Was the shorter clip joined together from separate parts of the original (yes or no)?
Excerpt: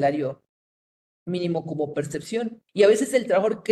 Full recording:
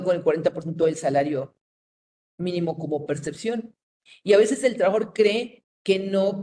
yes